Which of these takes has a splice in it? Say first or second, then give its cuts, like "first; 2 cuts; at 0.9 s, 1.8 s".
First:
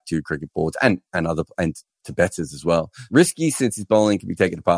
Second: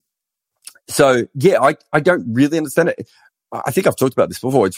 first; 1 cut; at 3.1 s